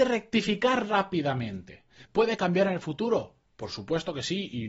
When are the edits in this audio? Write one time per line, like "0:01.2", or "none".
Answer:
0:02.1